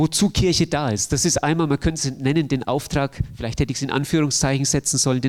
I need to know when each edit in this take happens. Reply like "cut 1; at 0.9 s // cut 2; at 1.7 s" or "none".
none

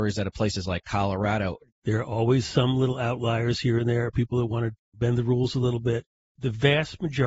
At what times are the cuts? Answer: cut 1; at 1.7 s // cut 2; at 6.3 s

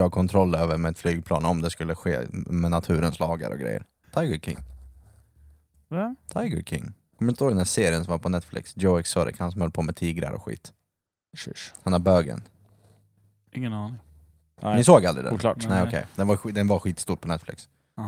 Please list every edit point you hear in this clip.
cut 1; at 4.0 s

